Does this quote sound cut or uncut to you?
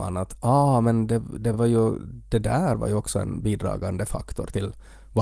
uncut